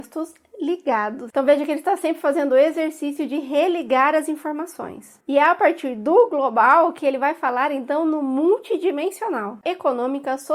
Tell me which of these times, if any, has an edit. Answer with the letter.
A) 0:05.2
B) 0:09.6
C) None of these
B